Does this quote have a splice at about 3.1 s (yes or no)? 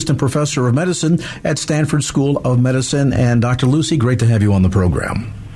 no